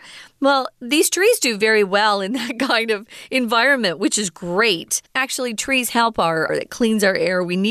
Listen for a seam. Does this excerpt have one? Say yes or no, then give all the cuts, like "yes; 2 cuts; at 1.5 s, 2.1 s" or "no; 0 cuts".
yes; 2 cuts; at 5.1 s, 6.5 s